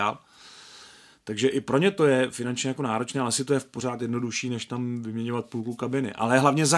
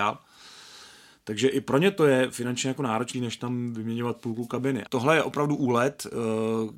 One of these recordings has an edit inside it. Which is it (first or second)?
second